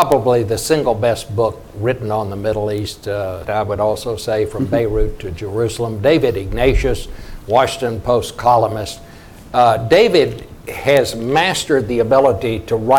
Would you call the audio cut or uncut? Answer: cut